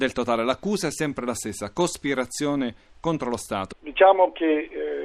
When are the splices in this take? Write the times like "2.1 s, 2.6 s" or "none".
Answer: 3.7 s